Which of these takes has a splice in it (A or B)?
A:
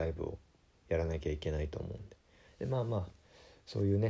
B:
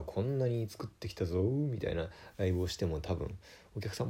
A